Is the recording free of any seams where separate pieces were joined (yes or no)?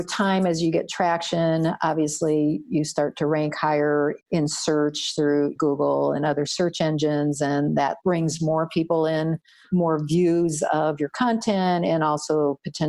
yes